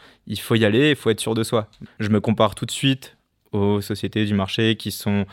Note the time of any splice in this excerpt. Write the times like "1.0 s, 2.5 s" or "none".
1.9 s